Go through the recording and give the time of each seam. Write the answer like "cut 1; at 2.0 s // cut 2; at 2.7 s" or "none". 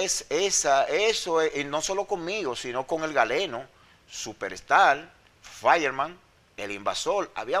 none